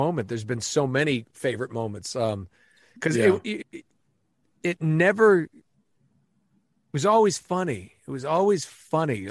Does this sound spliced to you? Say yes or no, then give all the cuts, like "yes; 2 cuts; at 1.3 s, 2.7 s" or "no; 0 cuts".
yes; 1 cut; at 3.6 s